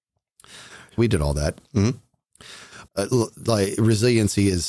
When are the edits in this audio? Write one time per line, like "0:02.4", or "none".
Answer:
0:01.0
0:02.9